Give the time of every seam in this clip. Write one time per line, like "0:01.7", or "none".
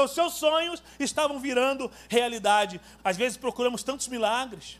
0:03.0